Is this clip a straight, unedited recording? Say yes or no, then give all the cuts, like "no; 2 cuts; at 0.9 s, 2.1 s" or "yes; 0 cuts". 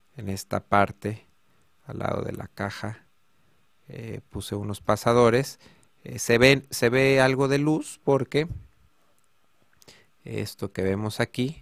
yes; 0 cuts